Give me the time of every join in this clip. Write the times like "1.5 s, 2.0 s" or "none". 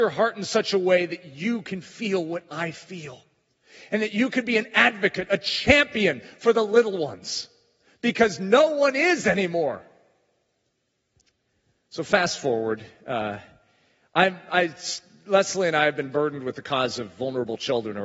none